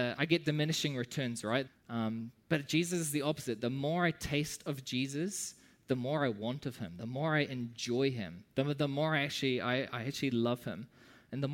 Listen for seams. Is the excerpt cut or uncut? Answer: cut